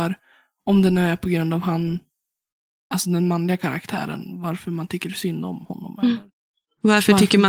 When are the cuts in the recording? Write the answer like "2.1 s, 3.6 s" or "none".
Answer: none